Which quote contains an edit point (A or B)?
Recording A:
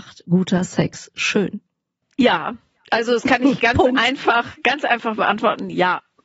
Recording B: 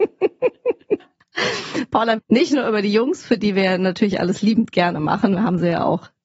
B